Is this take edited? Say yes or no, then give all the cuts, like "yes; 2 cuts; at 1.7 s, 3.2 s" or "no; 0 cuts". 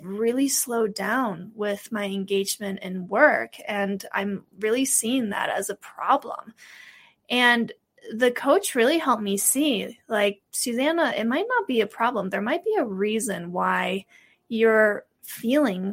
no; 0 cuts